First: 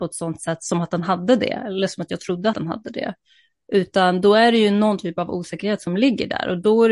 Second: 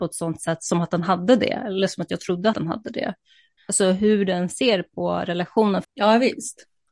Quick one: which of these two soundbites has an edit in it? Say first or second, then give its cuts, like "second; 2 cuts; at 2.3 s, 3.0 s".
second; 2 cuts; at 3.6 s, 5.8 s